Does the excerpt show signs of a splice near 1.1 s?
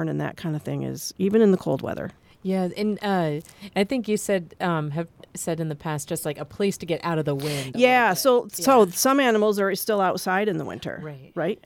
yes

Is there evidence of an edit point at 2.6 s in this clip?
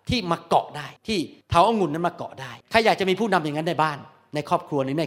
yes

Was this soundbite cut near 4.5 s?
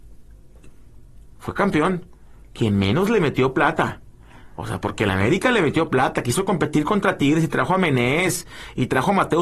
no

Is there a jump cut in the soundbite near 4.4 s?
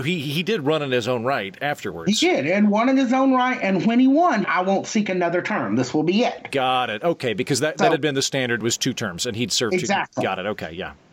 yes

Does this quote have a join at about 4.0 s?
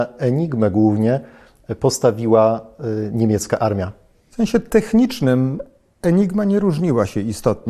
no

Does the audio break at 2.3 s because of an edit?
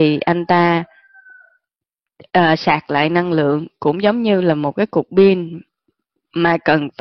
no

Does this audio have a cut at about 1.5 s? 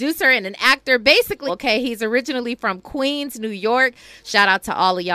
yes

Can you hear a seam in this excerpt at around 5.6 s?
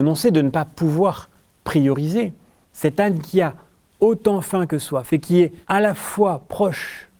yes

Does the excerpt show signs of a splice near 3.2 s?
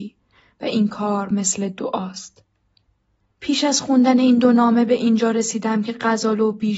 yes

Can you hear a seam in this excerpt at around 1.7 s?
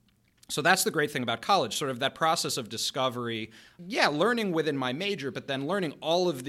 no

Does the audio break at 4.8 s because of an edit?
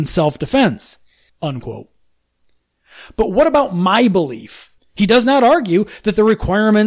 yes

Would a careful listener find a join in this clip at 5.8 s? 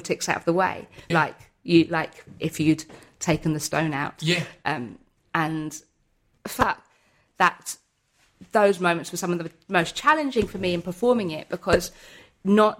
no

